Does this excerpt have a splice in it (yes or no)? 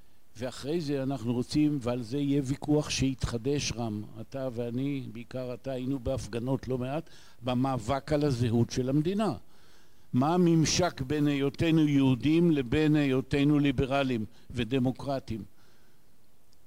no